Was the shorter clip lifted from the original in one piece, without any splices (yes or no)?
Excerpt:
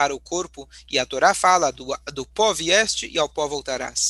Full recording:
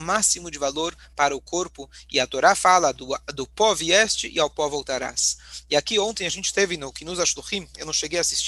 yes